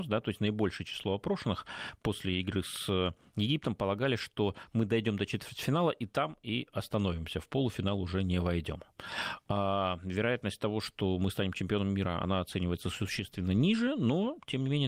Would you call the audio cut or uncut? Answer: uncut